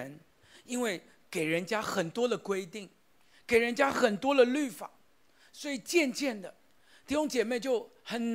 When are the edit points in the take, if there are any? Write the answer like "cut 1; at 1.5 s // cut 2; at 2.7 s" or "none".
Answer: none